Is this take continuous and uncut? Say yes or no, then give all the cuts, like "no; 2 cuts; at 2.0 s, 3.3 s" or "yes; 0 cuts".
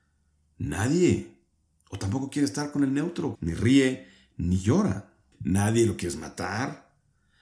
no; 2 cuts; at 3.4 s, 5.3 s